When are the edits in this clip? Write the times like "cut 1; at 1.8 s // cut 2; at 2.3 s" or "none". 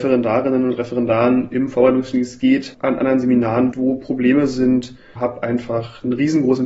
cut 1; at 3.7 s // cut 2; at 5.2 s

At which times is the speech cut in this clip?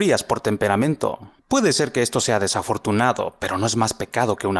cut 1; at 1.4 s

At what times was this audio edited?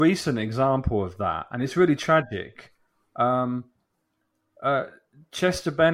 none

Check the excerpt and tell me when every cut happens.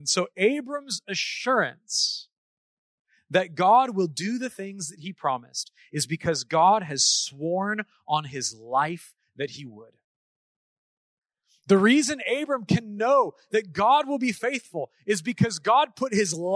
none

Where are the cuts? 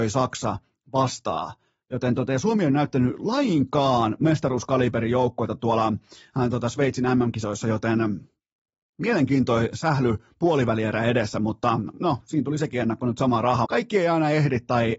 cut 1; at 13.6 s

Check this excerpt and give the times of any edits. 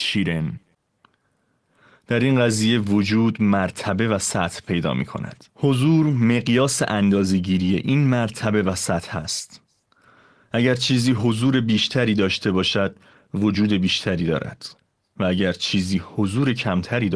cut 1; at 5.5 s

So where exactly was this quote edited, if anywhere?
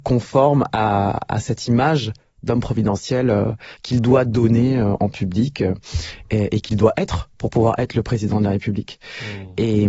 none

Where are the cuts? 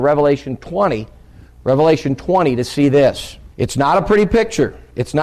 cut 1; at 3.5 s

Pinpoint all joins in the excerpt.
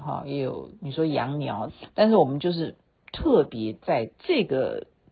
cut 1; at 1.7 s

